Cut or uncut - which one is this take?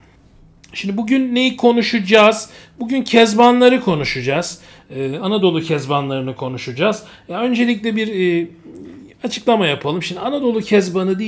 uncut